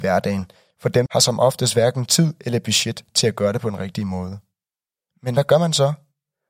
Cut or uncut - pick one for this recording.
cut